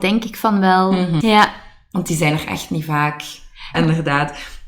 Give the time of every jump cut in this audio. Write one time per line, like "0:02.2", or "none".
0:01.2
0:03.7